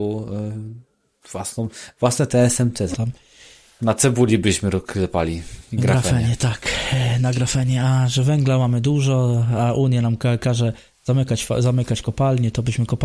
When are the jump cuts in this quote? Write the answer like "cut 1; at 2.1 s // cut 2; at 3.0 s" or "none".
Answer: cut 1; at 2.9 s